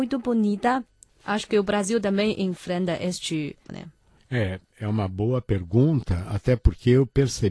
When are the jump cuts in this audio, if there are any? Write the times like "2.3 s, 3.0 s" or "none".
1.1 s, 3.7 s